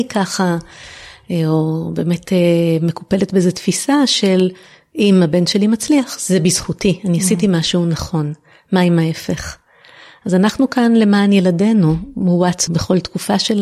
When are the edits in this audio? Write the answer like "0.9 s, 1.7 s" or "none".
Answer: 12.7 s